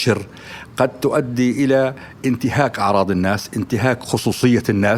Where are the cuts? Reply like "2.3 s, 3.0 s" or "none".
none